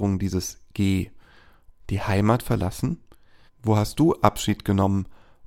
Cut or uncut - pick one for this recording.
cut